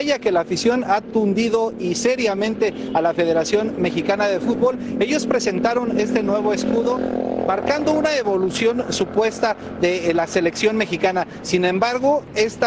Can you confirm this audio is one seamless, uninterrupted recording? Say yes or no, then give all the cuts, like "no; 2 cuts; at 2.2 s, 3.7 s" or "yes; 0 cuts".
yes; 0 cuts